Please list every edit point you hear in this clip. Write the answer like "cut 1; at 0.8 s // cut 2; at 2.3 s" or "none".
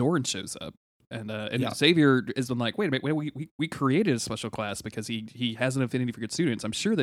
none